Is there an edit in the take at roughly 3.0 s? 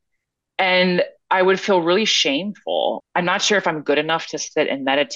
yes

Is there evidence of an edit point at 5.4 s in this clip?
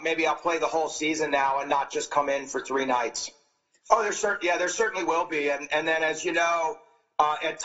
no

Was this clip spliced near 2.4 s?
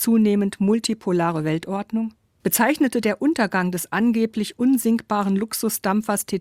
yes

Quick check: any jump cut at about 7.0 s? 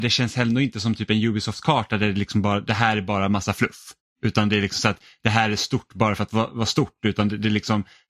no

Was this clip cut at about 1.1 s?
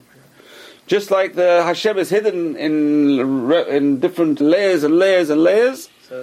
no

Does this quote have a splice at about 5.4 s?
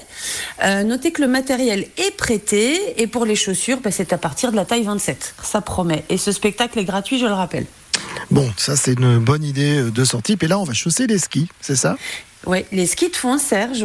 yes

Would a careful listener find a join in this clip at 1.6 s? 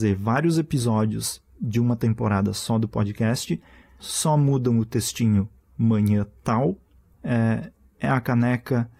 no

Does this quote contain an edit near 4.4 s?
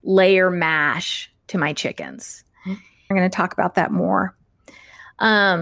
no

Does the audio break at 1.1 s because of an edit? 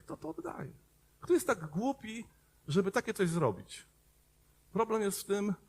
no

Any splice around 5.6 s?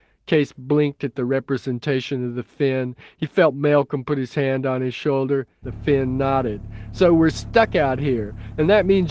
yes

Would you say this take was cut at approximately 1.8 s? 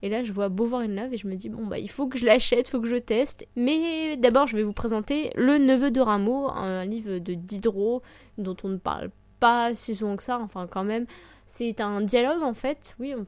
no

